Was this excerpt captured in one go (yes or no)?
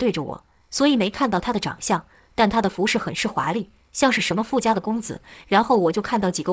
yes